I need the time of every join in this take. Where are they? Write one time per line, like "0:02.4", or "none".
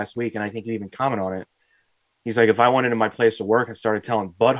none